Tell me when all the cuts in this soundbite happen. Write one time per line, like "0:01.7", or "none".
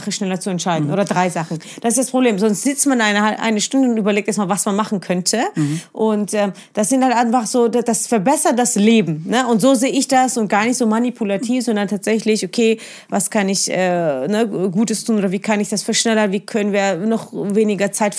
none